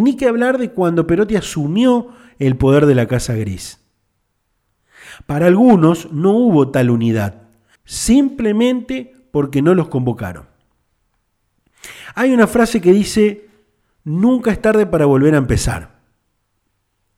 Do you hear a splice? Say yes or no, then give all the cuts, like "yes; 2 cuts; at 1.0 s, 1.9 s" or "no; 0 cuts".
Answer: yes; 1 cut; at 7.7 s